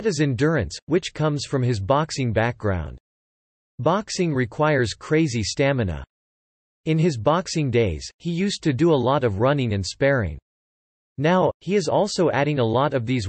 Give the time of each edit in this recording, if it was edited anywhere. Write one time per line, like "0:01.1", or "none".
0:11.6